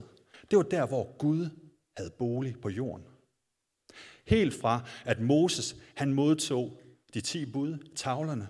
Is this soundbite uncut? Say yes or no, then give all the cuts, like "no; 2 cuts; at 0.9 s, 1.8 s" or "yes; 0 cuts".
yes; 0 cuts